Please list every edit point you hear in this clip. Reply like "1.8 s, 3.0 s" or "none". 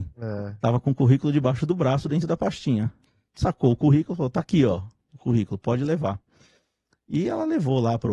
none